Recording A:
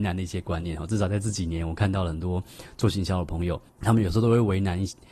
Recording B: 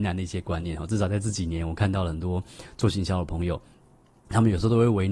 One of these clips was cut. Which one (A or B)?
A